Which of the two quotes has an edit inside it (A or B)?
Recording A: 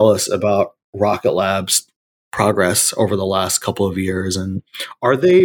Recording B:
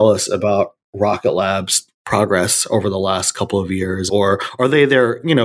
B